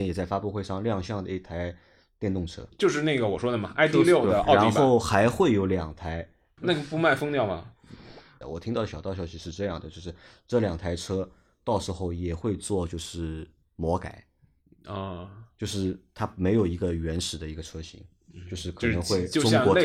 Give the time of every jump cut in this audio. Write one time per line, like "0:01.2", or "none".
0:06.6
0:08.4